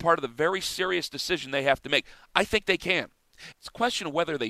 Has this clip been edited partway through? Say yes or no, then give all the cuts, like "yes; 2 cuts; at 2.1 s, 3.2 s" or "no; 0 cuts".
yes; 1 cut; at 3.5 s